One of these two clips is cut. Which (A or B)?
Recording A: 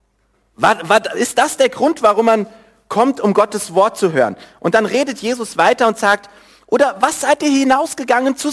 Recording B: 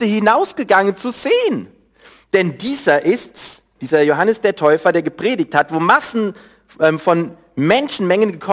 B